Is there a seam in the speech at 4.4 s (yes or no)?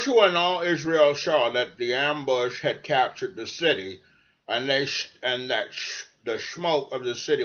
no